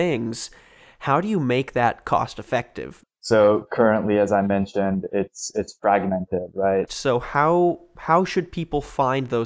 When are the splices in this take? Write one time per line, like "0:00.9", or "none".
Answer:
0:03.0
0:06.9